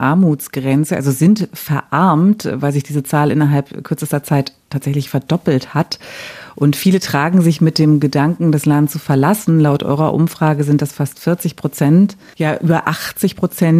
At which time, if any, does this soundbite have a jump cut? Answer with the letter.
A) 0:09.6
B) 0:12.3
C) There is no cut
B